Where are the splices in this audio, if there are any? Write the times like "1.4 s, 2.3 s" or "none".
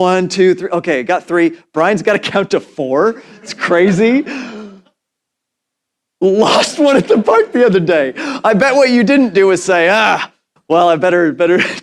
none